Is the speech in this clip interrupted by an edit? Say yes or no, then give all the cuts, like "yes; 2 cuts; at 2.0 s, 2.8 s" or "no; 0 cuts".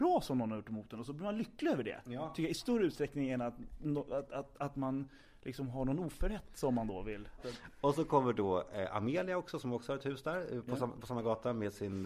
yes; 1 cut; at 7.4 s